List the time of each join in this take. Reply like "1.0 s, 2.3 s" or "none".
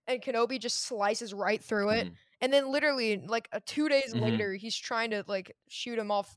none